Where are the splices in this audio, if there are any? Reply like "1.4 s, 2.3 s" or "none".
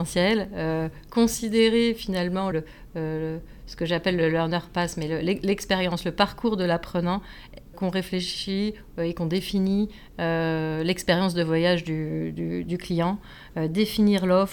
2.5 s, 7.7 s